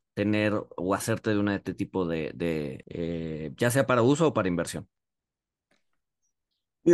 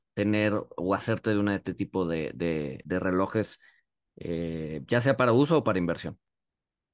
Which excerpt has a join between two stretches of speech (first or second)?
first